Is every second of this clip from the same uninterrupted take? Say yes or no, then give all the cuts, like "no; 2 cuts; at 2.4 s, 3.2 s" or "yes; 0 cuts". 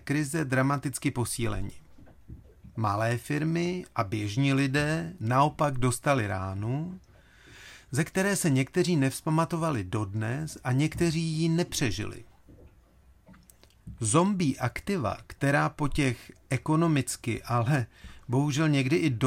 yes; 0 cuts